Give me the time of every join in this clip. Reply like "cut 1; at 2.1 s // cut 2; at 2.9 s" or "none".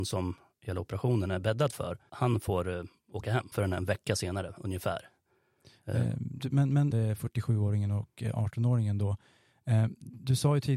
cut 1; at 2.1 s // cut 2; at 3.5 s // cut 3; at 6.9 s